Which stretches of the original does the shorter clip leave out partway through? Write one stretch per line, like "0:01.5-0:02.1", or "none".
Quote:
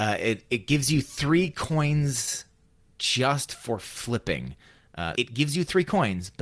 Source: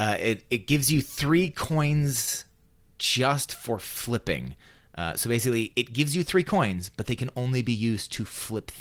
0:05.1-0:05.7